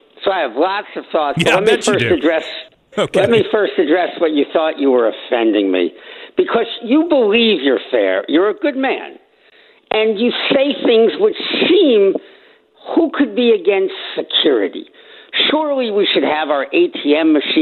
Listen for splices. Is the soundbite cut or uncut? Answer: uncut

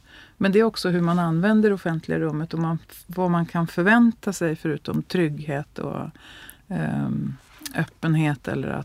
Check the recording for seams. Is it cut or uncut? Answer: uncut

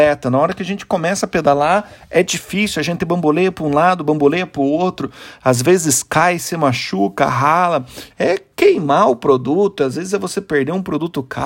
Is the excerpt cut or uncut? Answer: cut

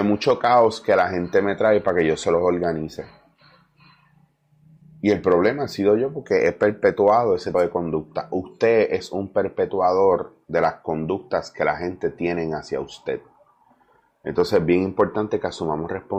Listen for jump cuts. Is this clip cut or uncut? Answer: cut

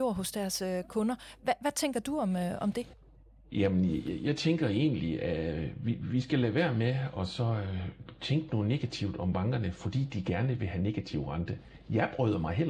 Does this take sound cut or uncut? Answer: uncut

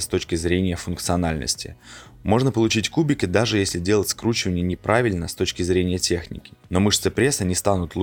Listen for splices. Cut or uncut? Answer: uncut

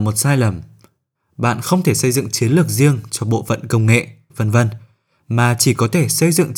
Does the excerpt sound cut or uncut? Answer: cut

